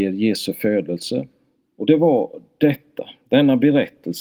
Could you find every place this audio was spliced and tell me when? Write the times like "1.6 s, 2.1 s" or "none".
1.6 s